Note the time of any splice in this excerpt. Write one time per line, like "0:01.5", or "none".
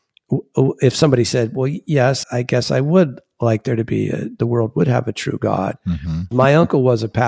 0:02.2
0:06.3